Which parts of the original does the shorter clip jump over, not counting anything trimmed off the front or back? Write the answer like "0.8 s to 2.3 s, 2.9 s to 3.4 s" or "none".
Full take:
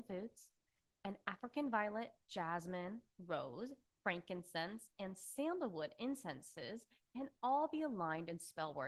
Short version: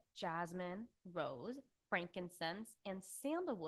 none